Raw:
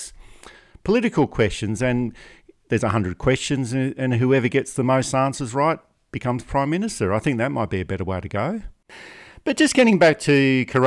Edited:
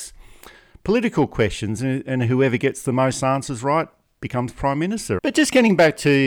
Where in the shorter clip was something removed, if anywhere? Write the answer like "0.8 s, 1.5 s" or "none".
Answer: 1.8 s, 5.2 s